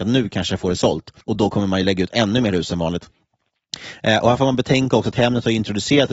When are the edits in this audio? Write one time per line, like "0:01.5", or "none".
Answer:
0:01.2